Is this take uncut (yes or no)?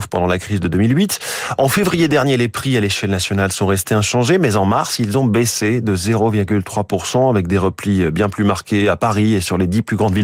yes